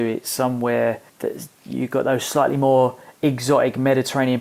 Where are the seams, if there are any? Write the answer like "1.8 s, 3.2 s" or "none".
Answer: 1.1 s